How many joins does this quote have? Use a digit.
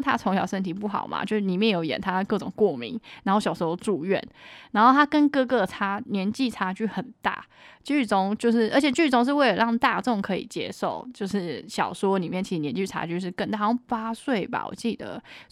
0